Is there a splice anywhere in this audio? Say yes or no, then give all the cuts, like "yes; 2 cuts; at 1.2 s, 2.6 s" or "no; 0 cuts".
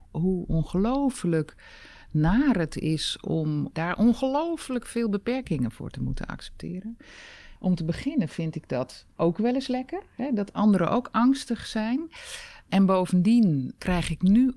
yes; 2 cuts; at 3.7 s, 7.6 s